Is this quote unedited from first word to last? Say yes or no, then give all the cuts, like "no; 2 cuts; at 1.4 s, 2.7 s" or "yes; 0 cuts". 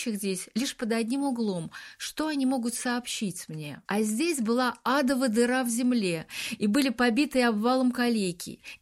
no; 1 cut; at 3.9 s